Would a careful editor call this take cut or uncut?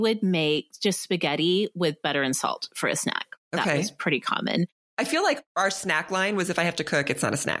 uncut